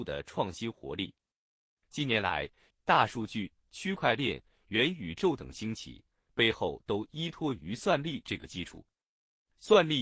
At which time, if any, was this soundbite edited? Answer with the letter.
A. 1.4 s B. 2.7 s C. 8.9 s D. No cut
B